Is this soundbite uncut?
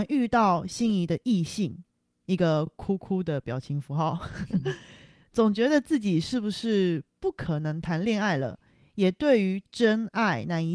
yes; 0 cuts

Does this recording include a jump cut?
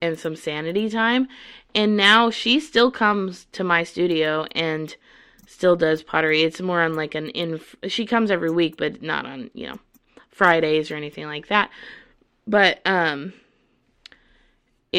no; 0 cuts

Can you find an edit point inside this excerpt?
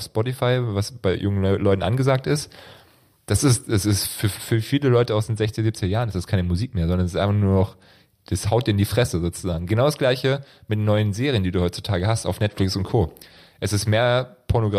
no; 0 cuts

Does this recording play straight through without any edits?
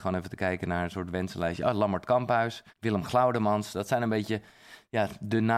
no; 1 cut; at 2.7 s

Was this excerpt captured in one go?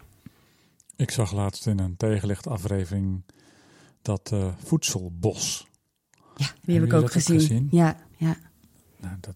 no; 1 cut; at 8.0 s

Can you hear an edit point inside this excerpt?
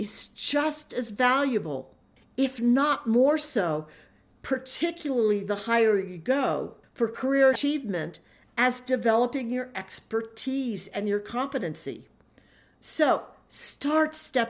no; 0 cuts

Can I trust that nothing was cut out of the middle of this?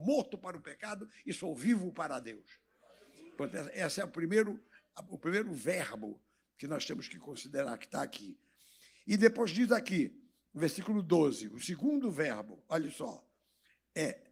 yes; 0 cuts

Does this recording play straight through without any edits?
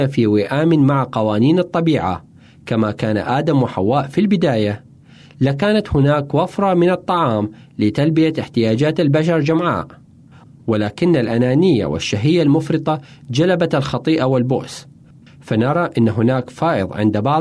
yes; 0 cuts

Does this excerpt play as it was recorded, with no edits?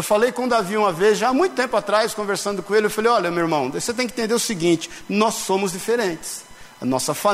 yes; 0 cuts

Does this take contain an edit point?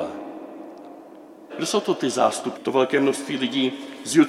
yes; 2 cuts; at 1.5 s, 2.5 s

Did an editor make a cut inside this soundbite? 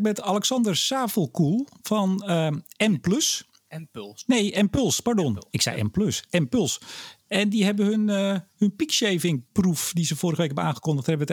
no; 0 cuts

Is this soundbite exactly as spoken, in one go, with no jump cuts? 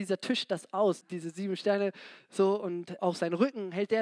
no; 2 cuts; at 1.0 s, 3.0 s

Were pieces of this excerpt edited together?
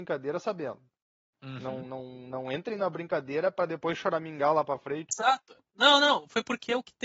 yes; 2 cuts; at 1.8 s, 5.1 s

